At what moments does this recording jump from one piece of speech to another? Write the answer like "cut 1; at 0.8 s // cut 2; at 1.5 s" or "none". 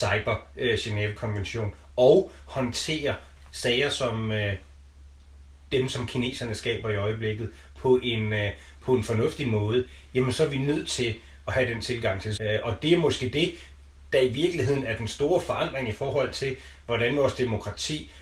cut 1; at 12.4 s